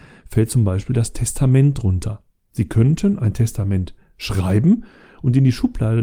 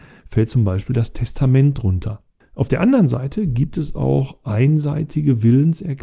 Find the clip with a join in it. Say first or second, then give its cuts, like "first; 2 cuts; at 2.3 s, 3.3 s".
second; 1 cut; at 2.4 s